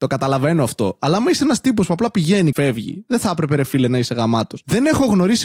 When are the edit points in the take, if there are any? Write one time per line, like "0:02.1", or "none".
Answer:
0:02.5